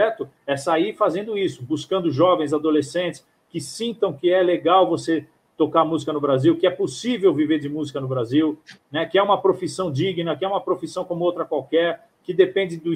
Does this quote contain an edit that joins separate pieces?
no; 0 cuts

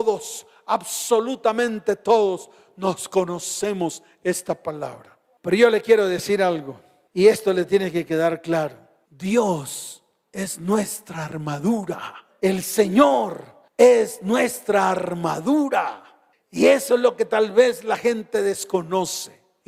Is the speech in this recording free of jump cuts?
yes; 0 cuts

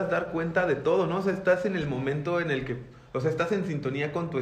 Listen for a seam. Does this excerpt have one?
no; 0 cuts

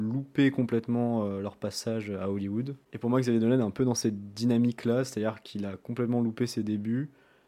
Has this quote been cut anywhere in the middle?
no; 0 cuts

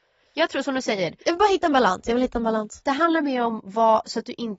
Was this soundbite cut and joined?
no; 0 cuts

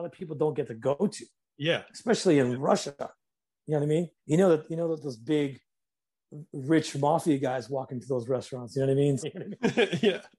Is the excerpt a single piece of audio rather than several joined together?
no; 2 cuts; at 4.2 s, 9.2 s

